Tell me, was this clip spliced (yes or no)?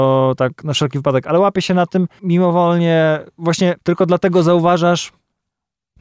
yes